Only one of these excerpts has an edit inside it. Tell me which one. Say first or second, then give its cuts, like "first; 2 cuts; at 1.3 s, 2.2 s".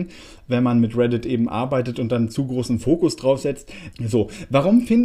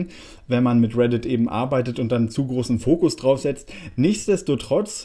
first; 1 cut; at 3.9 s